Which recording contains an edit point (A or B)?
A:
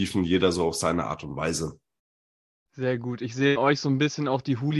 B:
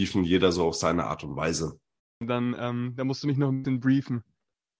B